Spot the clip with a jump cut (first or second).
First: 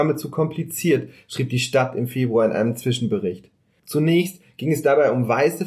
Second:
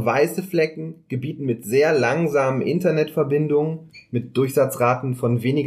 first